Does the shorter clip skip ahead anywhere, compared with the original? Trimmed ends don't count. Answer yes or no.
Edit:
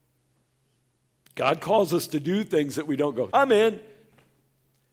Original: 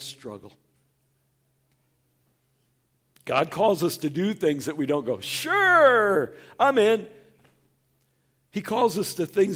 yes